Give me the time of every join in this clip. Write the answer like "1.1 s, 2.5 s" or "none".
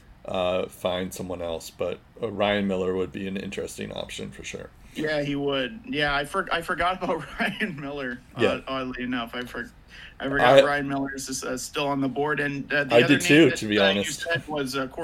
none